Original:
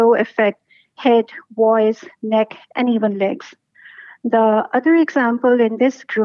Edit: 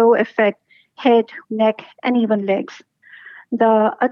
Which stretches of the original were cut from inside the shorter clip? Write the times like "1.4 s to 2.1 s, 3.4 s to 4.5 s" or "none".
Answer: 1.4 s to 2.2 s